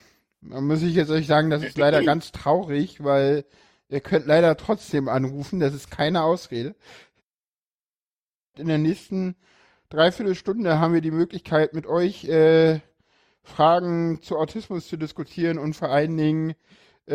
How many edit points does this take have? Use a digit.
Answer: 1